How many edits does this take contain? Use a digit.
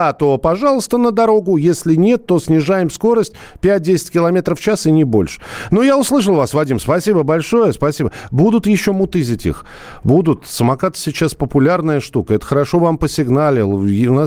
0